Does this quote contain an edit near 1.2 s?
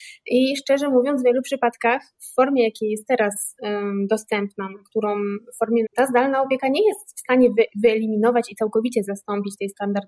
no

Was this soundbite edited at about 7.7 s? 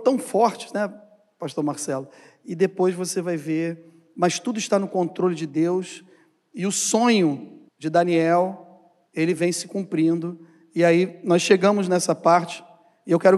yes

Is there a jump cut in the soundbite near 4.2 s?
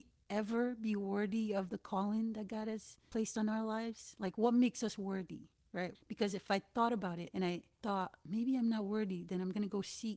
no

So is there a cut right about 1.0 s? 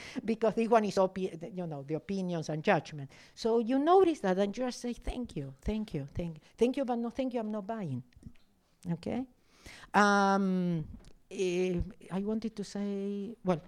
no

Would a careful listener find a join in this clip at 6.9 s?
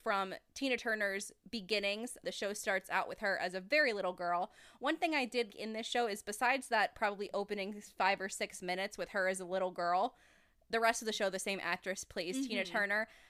no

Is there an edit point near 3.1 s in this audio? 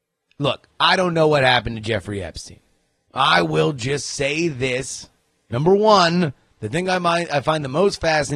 yes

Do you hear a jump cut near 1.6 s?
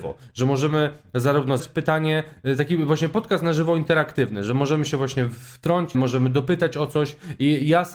yes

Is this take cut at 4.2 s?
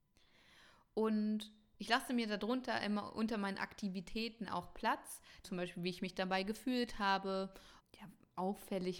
no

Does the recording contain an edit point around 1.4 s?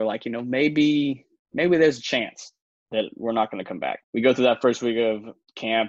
no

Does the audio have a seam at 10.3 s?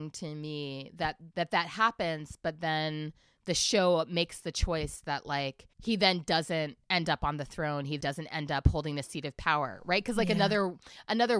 no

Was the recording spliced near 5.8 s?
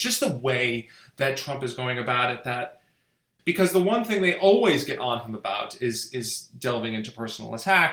no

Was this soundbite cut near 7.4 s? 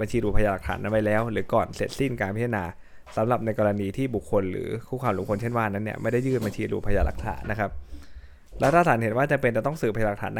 yes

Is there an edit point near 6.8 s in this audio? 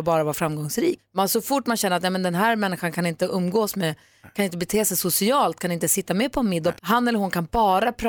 yes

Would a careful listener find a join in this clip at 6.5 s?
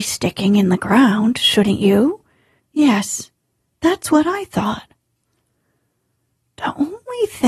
no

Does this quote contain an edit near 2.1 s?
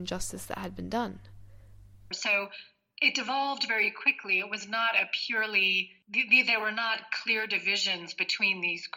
yes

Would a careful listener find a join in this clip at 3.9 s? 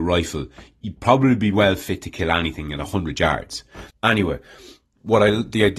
yes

